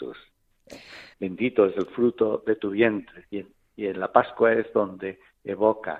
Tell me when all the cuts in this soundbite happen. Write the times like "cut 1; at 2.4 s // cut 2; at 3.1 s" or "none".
cut 1; at 1.1 s // cut 2; at 3.3 s